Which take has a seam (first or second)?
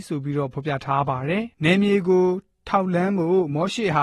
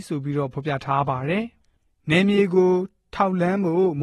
first